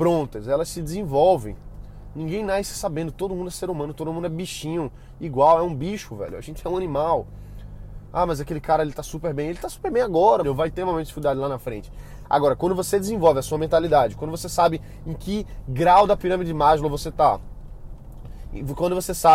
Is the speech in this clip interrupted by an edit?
yes; 1 cut; at 10.4 s

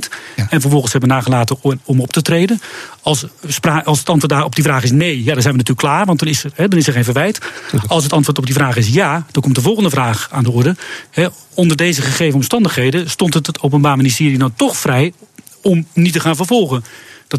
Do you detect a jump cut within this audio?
no; 0 cuts

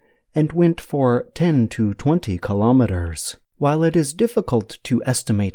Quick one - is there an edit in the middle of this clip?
yes; 1 cut; at 3.5 s

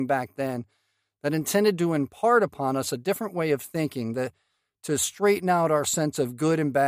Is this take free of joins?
yes; 0 cuts

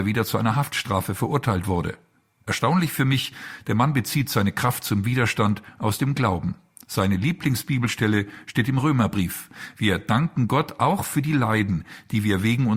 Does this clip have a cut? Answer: no; 0 cuts

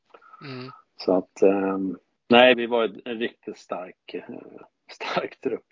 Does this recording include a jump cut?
yes; 1 cut; at 2.5 s

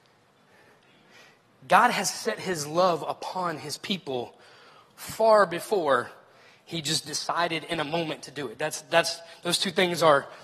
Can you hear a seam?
no; 0 cuts

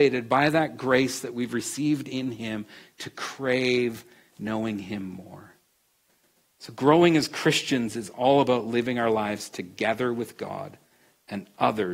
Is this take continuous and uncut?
yes; 0 cuts

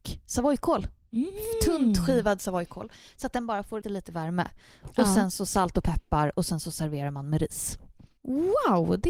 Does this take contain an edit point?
yes; 1 cut; at 3.8 s

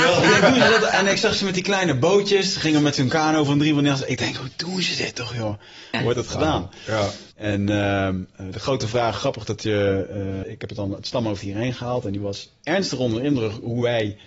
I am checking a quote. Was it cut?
yes; 3 cuts; at 5.9 s, 7.3 s, 10.4 s

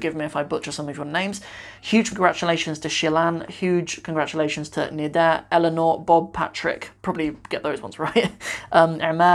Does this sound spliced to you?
no; 0 cuts

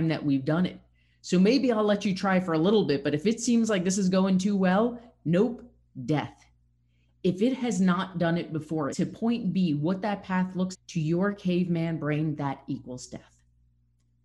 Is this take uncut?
no; 2 cuts; at 8.9 s, 10.7 s

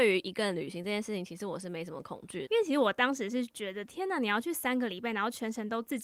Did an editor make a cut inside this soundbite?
yes; 1 cut; at 2.5 s

